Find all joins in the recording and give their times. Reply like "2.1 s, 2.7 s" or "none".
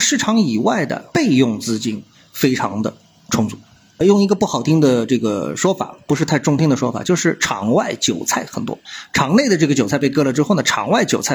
none